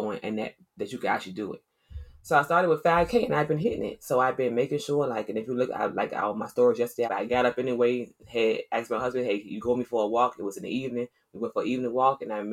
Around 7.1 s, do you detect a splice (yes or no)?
yes